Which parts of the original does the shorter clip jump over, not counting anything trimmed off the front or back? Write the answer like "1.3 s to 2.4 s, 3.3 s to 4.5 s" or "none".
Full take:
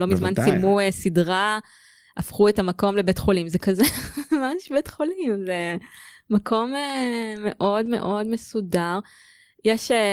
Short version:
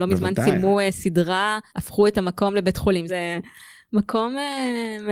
1.7 s to 2.1 s, 3.5 s to 5.4 s